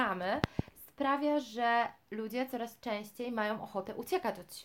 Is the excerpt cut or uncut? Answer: uncut